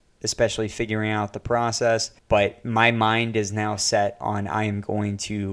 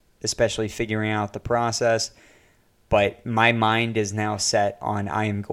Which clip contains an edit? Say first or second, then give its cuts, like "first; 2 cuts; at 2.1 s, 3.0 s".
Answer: first; 1 cut; at 2.2 s